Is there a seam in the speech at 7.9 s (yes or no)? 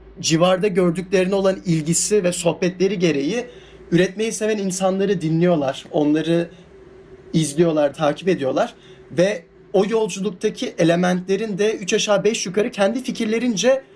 yes